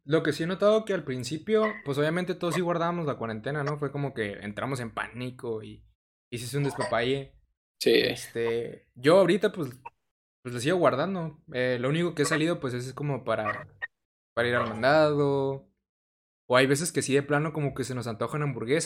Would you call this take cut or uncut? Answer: uncut